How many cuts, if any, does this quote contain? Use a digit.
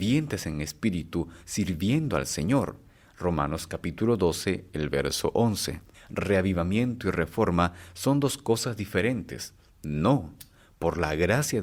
2